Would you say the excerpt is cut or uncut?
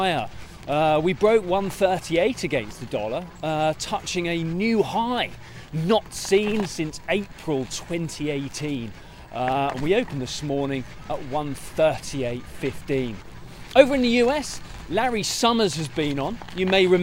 uncut